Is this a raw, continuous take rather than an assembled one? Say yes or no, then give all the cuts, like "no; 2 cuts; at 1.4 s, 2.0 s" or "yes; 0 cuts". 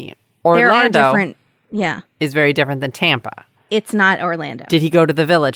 yes; 0 cuts